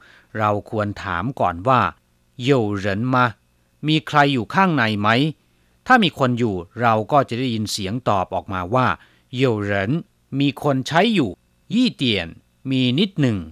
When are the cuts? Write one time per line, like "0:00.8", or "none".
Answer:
0:11.7